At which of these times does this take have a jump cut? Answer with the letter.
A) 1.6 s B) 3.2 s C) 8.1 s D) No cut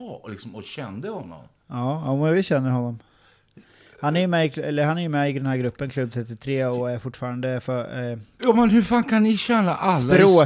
D